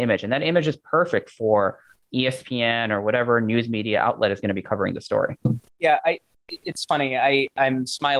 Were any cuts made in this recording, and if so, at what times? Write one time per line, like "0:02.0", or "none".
0:05.7